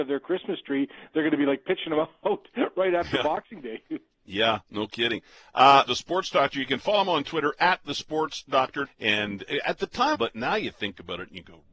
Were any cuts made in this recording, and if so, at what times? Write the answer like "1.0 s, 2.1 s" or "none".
5.9 s, 8.8 s, 10.1 s